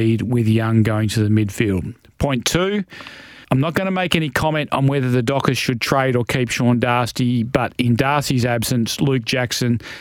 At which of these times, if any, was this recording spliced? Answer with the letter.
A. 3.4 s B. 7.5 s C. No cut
A